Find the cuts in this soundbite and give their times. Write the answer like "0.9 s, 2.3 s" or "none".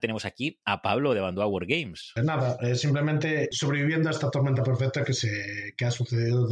2.2 s, 3.5 s

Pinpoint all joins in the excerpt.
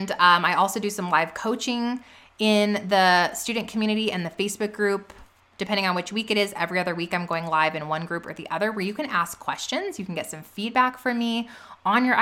none

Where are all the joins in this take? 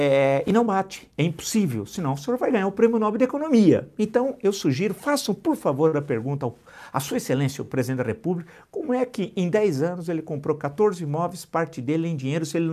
none

